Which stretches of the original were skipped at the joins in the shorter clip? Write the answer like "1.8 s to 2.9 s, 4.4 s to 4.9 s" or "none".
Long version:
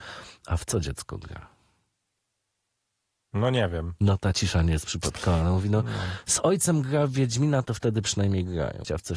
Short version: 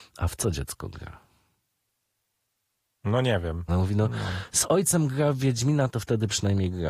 4.0 s to 5.4 s

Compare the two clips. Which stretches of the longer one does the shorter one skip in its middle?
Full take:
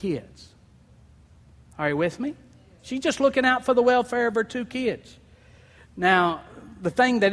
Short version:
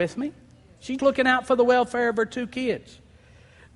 3.0 s to 3.2 s

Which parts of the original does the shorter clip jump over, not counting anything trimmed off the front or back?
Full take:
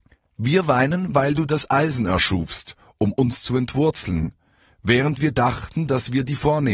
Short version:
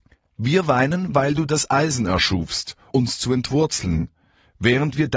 2.9 s to 3.1 s

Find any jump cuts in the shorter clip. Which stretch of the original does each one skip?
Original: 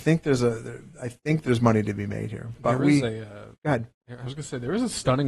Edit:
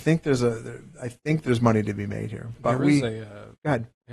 none

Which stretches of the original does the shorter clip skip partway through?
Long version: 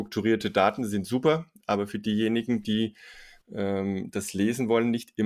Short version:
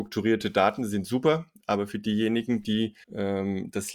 3.0 s to 3.4 s

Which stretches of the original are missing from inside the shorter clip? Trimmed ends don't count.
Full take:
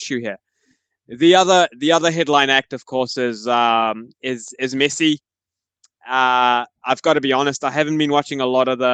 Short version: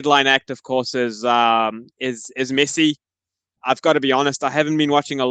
5.8 s to 6.8 s

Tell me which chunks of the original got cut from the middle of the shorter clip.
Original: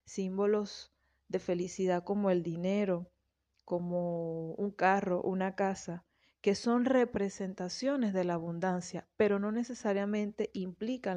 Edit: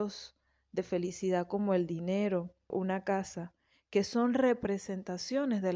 3.3 s to 5.2 s

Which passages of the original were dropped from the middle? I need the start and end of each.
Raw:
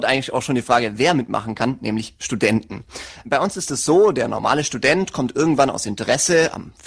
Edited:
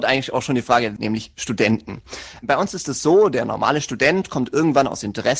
1.0 s to 1.8 s

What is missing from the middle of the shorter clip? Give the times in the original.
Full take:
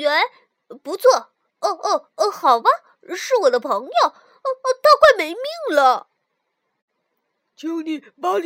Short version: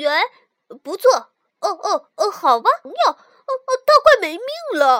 2.9 s to 3.8 s

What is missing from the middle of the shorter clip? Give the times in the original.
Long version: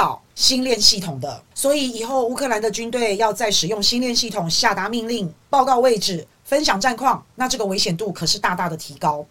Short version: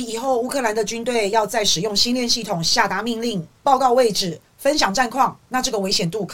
none

